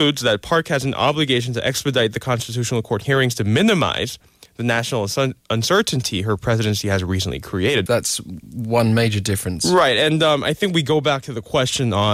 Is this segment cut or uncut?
cut